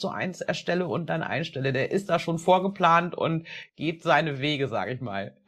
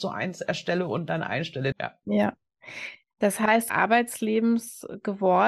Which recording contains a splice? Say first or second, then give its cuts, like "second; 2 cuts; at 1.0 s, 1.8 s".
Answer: second; 2 cuts; at 1.7 s, 3.7 s